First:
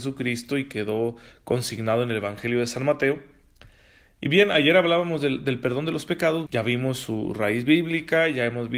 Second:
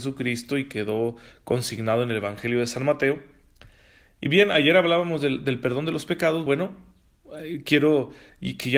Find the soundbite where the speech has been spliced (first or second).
first